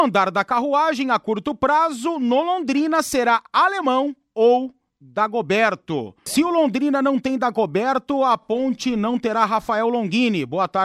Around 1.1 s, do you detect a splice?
no; 1 cut; at 6.3 s

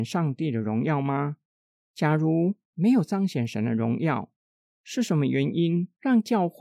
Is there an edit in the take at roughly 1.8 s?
no; 0 cuts

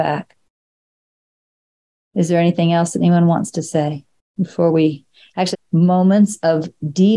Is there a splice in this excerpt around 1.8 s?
no; 1 cut; at 5.5 s

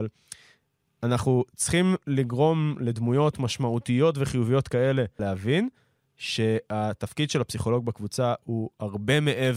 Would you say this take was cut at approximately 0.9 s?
no; 1 cut; at 5.2 s

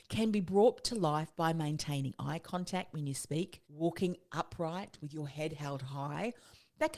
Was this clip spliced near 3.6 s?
yes; 1 cut; at 3.6 s

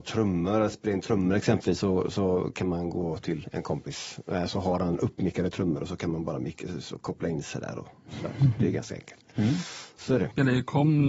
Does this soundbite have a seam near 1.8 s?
no; 0 cuts

